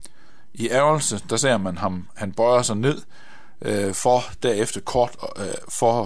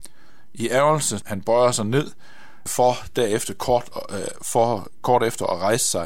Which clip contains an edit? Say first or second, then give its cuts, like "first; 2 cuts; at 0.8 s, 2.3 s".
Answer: second; 2 cuts; at 1.2 s, 2.7 s